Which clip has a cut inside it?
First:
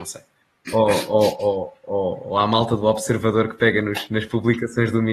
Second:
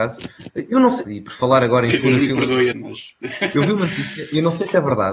second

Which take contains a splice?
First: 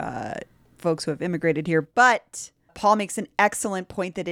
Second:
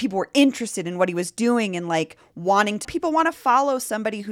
second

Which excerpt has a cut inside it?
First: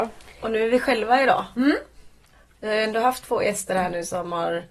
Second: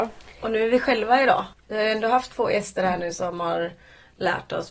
second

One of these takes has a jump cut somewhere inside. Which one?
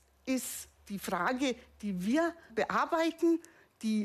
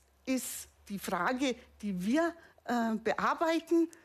first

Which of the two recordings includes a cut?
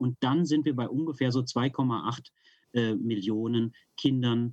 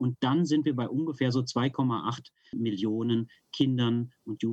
second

